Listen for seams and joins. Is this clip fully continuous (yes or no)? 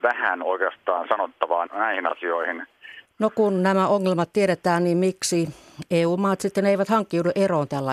no